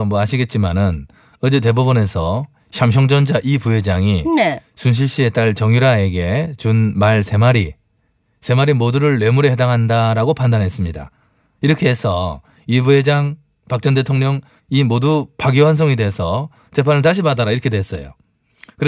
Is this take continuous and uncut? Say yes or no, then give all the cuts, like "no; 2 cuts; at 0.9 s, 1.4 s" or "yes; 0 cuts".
no; 1 cut; at 14.6 s